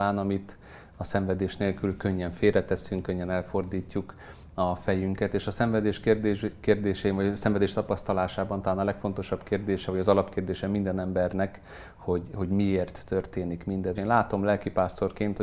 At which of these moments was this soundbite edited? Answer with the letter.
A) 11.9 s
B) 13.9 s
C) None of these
B